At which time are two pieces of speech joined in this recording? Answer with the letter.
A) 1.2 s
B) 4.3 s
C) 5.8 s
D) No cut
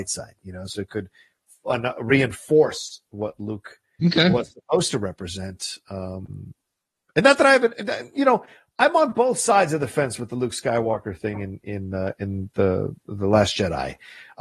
D